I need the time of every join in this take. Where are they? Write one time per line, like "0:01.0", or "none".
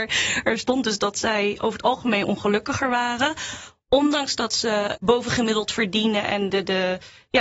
0:05.0
0:06.5